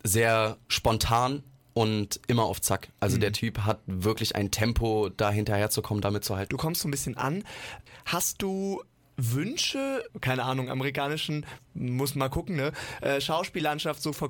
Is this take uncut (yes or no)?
no